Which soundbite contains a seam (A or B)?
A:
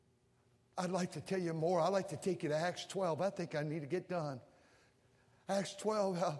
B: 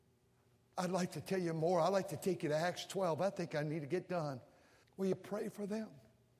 B